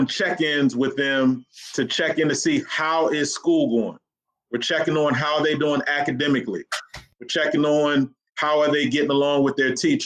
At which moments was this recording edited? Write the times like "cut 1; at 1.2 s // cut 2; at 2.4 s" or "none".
none